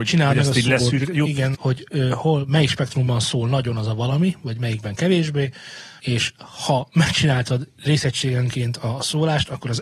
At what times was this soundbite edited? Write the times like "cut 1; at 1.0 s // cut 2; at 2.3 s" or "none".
cut 1; at 1.5 s // cut 2; at 6.0 s

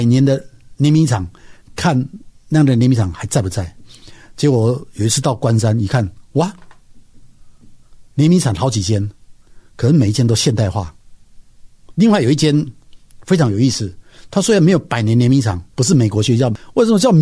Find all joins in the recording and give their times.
cut 1; at 15.7 s

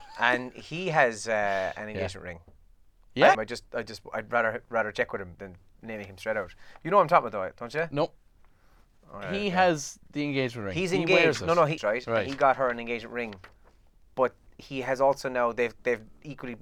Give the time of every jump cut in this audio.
cut 1; at 3.3 s // cut 2; at 5.4 s // cut 3; at 11.8 s

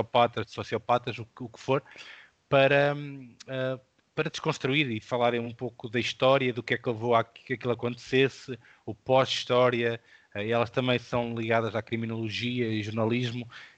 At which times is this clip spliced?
none

